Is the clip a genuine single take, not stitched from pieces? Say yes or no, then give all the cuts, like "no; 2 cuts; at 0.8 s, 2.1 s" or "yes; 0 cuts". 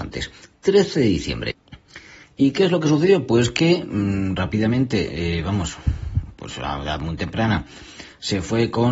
yes; 0 cuts